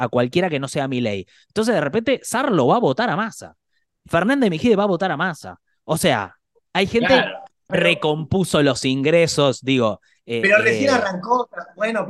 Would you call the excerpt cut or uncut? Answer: cut